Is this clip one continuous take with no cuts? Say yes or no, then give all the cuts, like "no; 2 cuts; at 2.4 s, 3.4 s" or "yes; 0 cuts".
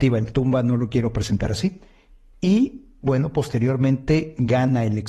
yes; 0 cuts